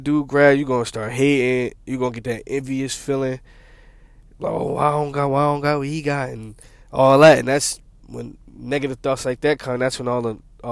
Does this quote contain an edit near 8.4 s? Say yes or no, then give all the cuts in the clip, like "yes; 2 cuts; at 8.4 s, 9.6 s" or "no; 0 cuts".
yes; 1 cut; at 8.4 s